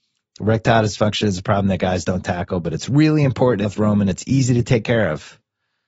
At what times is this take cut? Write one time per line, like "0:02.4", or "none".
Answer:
0:03.6